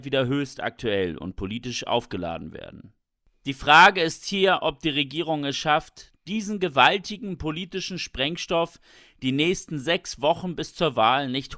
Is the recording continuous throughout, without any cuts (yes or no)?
yes